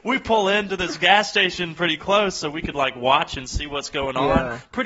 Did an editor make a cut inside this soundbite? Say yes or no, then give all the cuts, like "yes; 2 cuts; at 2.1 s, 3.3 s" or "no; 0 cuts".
no; 0 cuts